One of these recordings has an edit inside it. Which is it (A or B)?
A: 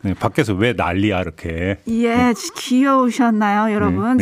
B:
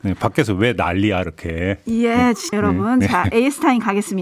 B